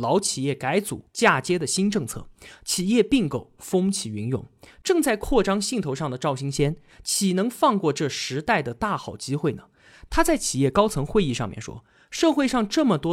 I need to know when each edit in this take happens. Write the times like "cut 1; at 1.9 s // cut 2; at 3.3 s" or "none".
none

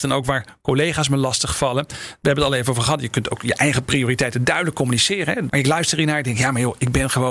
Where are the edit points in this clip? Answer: cut 1; at 5.5 s

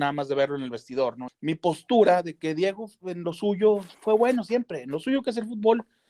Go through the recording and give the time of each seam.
cut 1; at 1.3 s

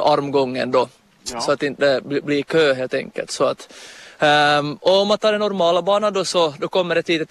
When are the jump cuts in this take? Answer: none

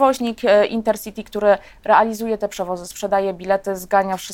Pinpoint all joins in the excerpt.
none

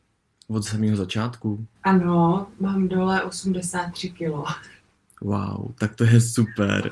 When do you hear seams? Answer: cut 1; at 1.8 s

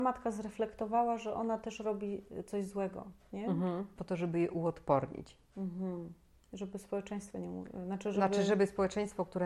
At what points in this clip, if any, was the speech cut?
cut 1; at 4.0 s

